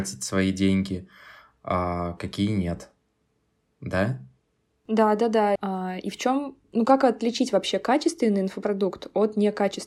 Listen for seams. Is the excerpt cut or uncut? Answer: cut